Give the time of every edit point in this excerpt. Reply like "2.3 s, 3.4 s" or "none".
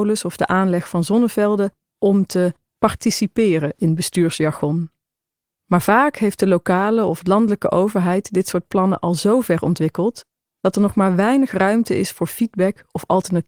1.9 s